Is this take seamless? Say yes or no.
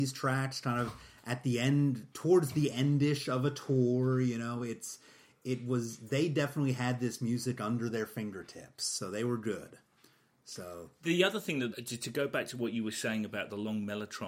no